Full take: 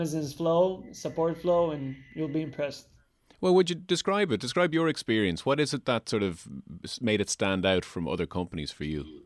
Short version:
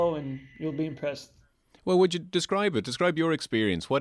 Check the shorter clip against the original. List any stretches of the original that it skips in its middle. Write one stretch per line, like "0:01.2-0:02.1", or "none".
none

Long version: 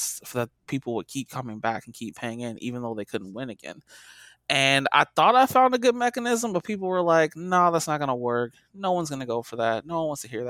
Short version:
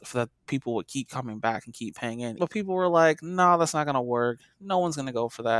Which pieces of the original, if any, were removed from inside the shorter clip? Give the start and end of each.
0:02.6-0:06.5

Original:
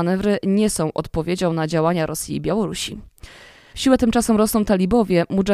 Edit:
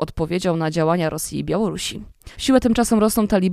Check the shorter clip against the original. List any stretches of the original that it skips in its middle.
0:03.3-0:03.7

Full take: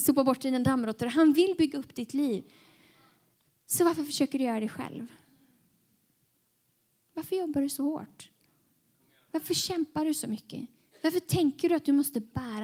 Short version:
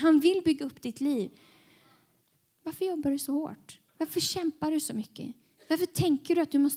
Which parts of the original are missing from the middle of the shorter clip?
0:03.6-0:07.0
0:08.4-0:09.2

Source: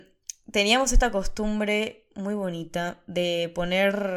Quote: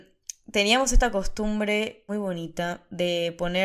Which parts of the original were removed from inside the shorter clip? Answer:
0:02.1-0:02.3

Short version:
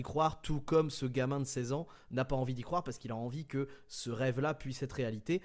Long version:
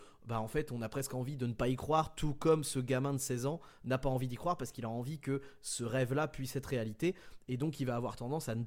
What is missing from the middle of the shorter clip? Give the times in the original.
none

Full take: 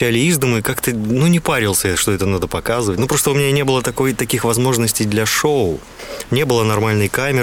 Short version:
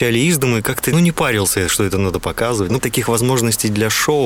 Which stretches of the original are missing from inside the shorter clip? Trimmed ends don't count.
0:00.9-0:01.2
0:03.1-0:04.2

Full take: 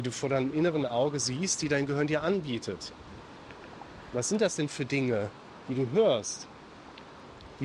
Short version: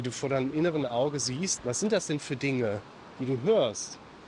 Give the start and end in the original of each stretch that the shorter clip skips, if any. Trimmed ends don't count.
0:01.6-0:04.1

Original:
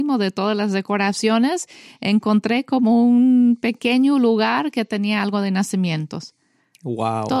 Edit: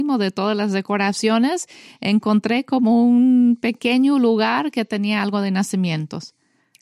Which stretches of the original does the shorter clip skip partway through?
none

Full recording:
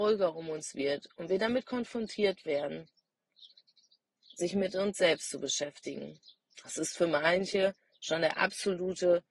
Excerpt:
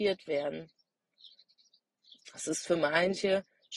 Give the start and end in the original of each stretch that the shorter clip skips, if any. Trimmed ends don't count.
0:04.3-0:06.5

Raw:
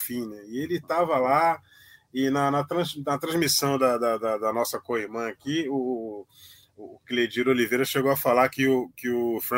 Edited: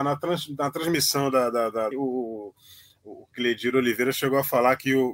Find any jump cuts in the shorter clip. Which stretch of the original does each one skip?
0:04.4-0:05.6

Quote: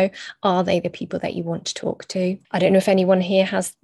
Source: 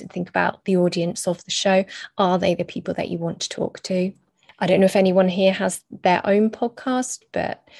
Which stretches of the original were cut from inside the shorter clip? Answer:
0:04.2-0:04.5

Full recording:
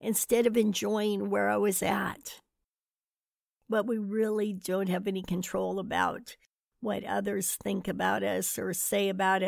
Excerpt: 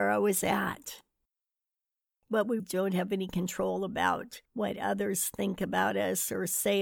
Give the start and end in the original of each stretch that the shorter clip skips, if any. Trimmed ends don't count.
0:04.0-0:04.5
0:06.4-0:06.7

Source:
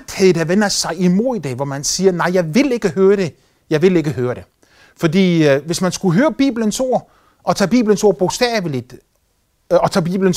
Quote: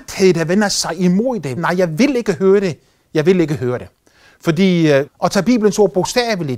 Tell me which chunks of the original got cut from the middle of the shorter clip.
0:01.6-0:02.1
0:05.6-0:07.3

